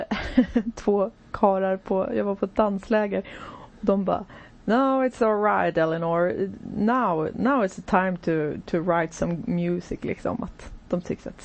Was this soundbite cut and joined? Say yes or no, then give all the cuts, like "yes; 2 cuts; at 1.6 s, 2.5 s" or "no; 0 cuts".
no; 0 cuts